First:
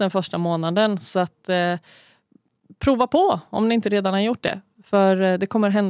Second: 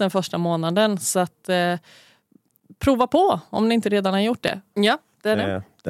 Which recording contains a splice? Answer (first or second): second